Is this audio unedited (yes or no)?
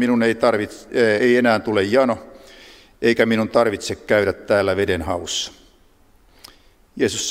yes